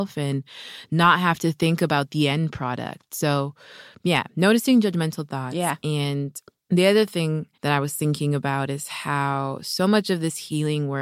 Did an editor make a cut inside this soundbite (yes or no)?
yes